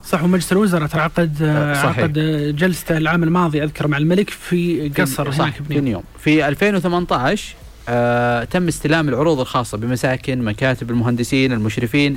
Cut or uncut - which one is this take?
uncut